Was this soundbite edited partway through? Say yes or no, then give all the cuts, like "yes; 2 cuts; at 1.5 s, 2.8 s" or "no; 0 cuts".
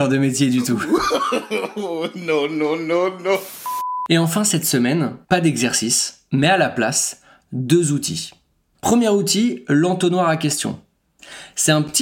no; 0 cuts